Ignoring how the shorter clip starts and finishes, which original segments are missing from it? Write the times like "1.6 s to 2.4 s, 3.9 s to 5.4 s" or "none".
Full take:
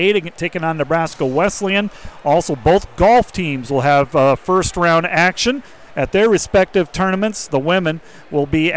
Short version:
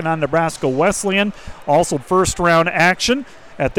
2.6 s to 4.4 s